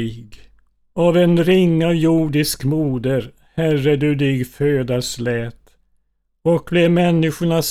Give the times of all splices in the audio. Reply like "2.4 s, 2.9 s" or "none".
none